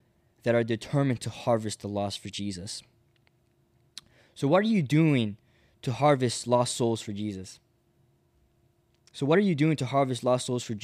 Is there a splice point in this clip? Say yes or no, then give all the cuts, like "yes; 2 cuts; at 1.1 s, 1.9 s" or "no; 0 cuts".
no; 0 cuts